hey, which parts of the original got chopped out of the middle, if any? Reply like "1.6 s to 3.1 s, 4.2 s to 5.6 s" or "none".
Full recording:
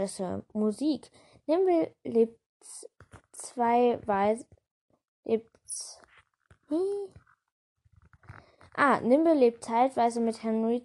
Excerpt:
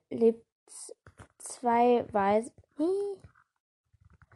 4.6 s to 6.6 s